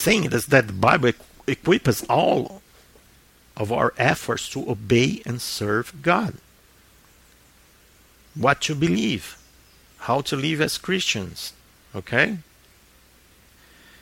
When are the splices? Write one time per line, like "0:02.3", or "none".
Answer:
none